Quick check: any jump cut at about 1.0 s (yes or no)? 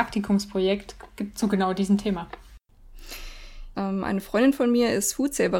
no